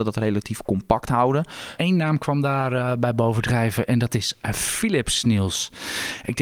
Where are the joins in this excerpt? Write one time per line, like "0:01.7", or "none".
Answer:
0:01.8